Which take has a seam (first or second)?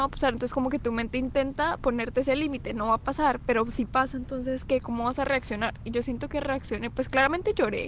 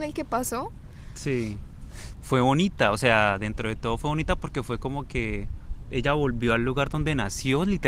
second